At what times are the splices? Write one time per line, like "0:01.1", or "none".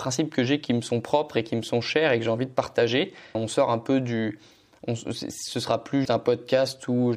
0:03.3
0:06.0